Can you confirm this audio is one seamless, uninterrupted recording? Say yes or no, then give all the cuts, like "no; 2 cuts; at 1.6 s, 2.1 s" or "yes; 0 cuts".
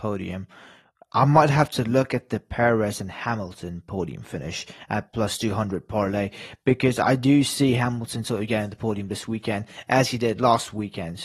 yes; 0 cuts